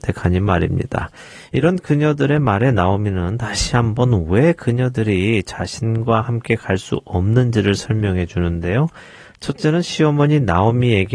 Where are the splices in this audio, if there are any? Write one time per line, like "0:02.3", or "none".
none